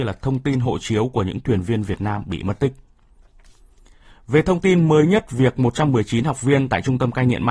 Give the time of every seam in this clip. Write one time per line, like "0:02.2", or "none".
none